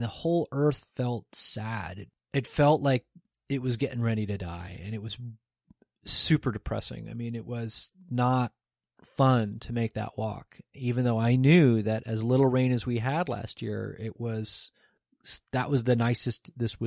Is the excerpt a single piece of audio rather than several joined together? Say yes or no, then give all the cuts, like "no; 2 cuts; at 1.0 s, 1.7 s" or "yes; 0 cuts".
yes; 0 cuts